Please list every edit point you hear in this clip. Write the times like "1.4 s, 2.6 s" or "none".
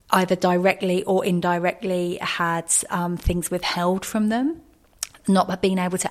none